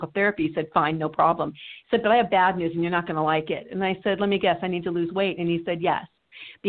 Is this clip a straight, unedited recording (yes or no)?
yes